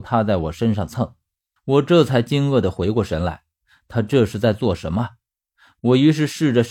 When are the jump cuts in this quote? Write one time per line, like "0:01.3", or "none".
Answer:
0:01.6